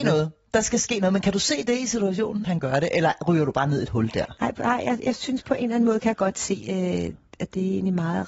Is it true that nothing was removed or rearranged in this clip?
no; 1 cut; at 2.4 s

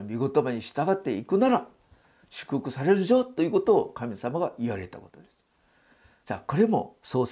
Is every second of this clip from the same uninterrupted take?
yes; 0 cuts

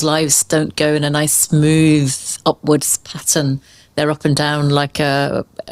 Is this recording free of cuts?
yes; 0 cuts

